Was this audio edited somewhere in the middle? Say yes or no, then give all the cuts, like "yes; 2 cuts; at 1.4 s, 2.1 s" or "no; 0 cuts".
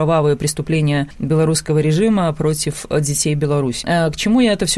no; 0 cuts